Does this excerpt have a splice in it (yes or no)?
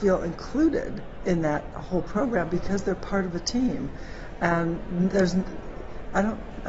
no